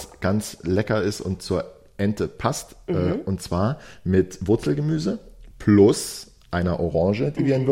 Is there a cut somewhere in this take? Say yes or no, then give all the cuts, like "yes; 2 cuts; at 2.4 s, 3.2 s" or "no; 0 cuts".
no; 0 cuts